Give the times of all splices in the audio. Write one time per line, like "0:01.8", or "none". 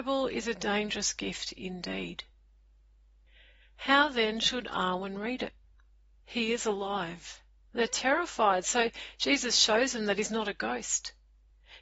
0:06.2
0:07.7